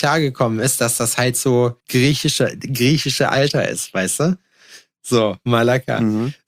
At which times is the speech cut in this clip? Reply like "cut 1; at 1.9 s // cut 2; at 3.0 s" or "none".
cut 1; at 1.8 s